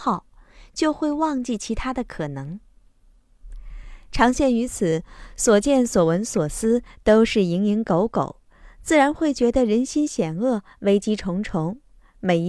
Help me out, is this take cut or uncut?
uncut